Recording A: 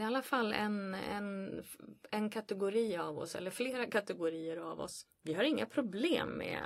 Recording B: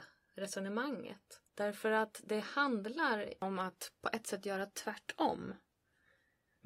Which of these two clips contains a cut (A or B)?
B